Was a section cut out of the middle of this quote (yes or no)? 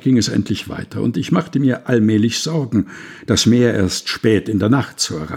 no